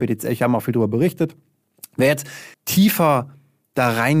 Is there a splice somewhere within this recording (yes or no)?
yes